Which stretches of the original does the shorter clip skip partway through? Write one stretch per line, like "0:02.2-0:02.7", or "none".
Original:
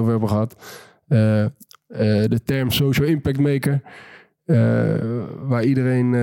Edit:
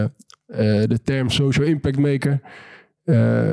none